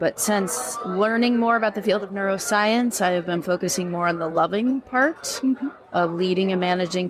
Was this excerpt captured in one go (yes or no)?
yes